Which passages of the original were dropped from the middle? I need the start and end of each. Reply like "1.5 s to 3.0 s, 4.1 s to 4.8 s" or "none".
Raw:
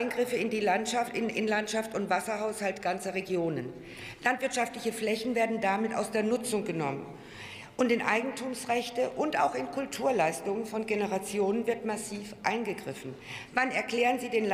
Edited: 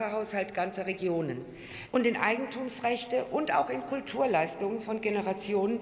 4.2 s to 7.7 s